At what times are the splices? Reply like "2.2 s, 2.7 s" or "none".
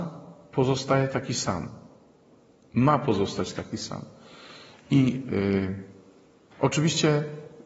none